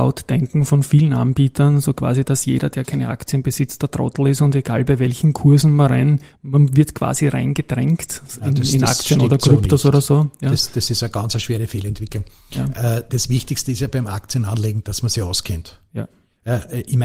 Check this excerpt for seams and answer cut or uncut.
uncut